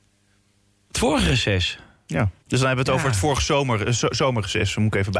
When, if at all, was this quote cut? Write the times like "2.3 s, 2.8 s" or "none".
2.4 s